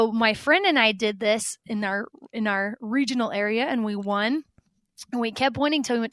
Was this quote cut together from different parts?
no; 0 cuts

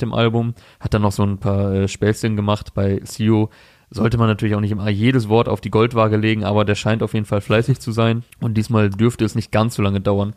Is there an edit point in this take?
yes; 1 cut; at 8.3 s

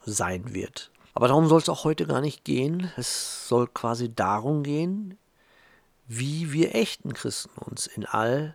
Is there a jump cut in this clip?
yes; 1 cut; at 1.1 s

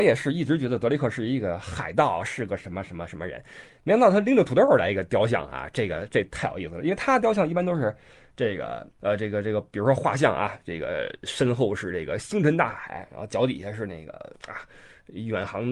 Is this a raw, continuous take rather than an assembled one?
yes; 0 cuts

